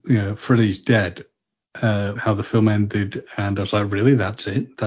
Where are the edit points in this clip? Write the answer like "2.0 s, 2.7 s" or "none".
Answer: 2.1 s